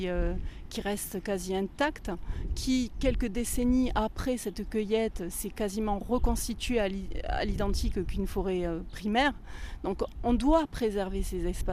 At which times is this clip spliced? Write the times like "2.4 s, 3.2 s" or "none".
10.1 s